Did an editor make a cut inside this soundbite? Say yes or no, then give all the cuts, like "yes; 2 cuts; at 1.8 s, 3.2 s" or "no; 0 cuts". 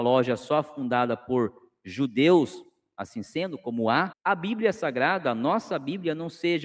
yes; 1 cut; at 4.1 s